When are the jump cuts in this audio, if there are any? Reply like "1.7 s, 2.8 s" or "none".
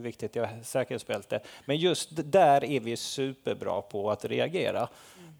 none